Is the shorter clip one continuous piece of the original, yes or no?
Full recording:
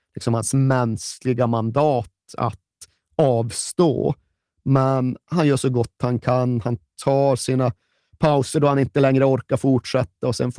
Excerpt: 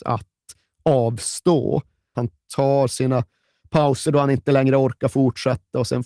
no